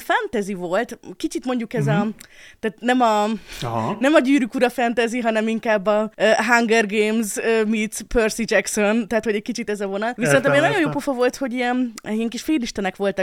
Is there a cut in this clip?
no; 0 cuts

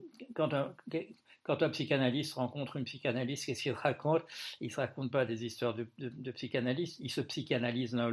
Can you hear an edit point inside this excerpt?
no; 0 cuts

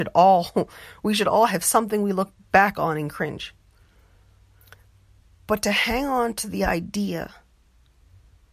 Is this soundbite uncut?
yes; 0 cuts

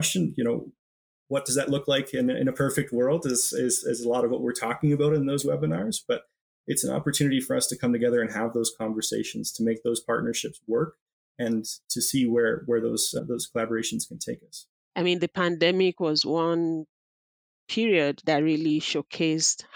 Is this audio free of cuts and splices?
no; 1 cut; at 14.8 s

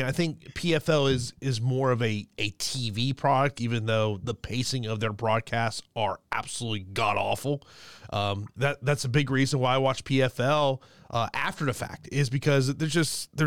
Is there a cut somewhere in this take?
no; 0 cuts

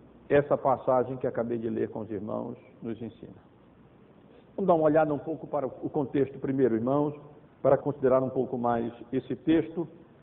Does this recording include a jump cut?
yes; 1 cut; at 7.8 s

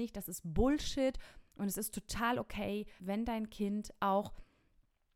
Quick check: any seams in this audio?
yes; 1 cut; at 3.0 s

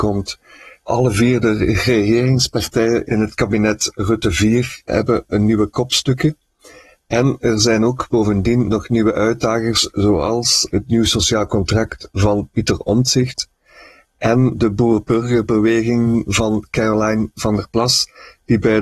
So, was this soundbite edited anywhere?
no; 0 cuts

